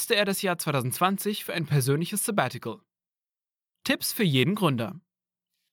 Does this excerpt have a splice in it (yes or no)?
no